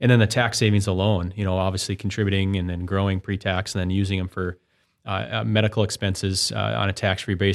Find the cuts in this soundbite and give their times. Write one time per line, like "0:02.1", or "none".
none